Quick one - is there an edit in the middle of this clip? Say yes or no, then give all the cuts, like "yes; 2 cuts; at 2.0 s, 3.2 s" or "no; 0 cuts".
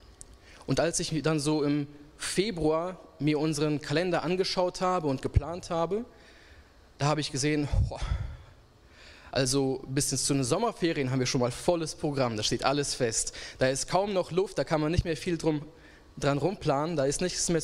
no; 0 cuts